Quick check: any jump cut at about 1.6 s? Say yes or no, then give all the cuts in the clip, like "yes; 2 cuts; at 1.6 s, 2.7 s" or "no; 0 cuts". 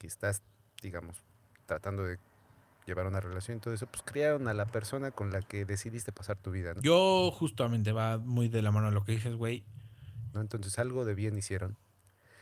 no; 2 cuts; at 6.8 s, 10.3 s